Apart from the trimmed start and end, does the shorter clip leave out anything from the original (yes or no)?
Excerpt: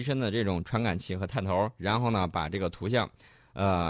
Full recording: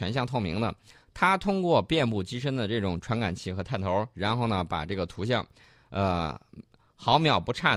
no